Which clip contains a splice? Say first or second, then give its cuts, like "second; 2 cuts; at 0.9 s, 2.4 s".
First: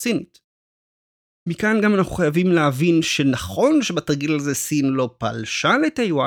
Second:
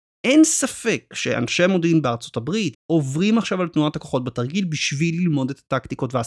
second; 1 cut; at 2.7 s